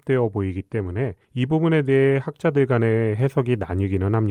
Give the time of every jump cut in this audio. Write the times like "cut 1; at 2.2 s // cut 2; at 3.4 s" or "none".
cut 1; at 1.2 s

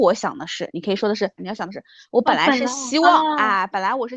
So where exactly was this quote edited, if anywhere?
cut 1; at 1.4 s

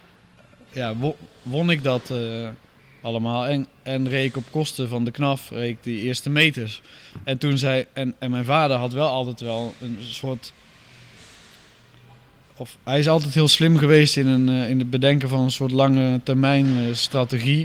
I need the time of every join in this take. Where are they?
none

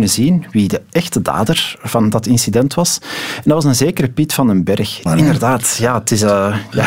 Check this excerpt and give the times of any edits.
cut 1; at 5.1 s

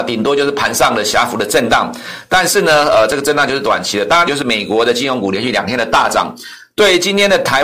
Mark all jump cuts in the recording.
cut 1; at 4.3 s

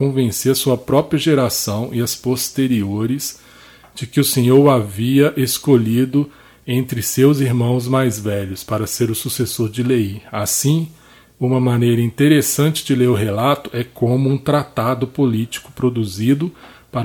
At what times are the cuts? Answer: none

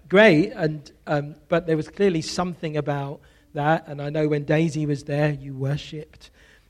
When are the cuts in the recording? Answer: none

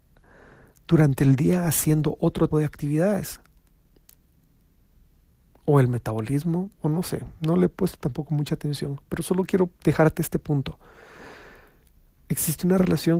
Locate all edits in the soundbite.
cut 1; at 2.5 s // cut 2; at 9.7 s

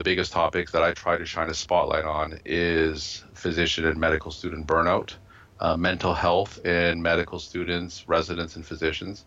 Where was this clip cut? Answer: none

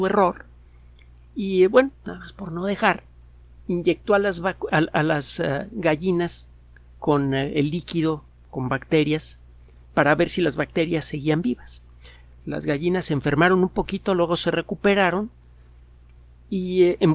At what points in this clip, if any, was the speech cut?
cut 1; at 4.7 s

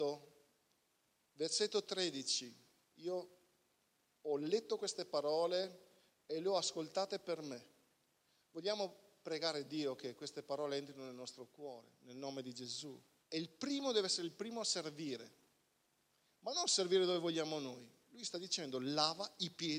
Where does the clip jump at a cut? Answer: cut 1; at 13.2 s

